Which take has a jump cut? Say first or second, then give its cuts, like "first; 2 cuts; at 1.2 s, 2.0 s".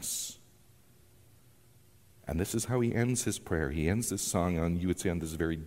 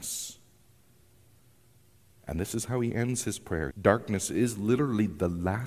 second; 1 cut; at 3.7 s